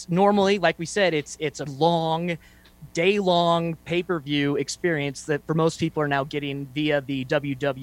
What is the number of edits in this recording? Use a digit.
1